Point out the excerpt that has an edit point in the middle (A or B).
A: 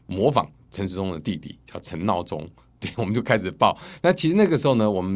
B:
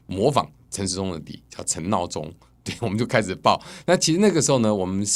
B